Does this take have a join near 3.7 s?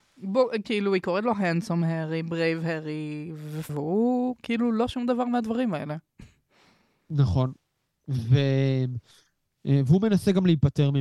yes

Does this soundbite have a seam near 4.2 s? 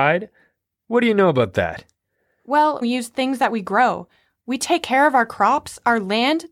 no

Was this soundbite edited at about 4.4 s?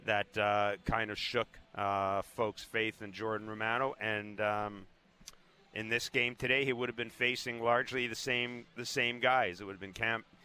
no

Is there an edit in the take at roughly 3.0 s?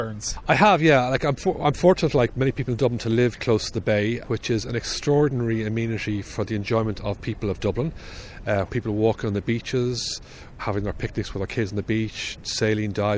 no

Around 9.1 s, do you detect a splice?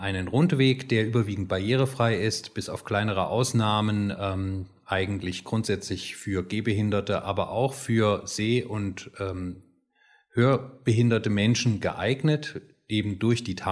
no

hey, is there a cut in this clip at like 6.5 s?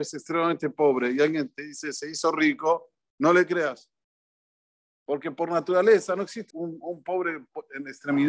yes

